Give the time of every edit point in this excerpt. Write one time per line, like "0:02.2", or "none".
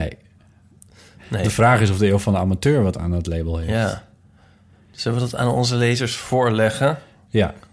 none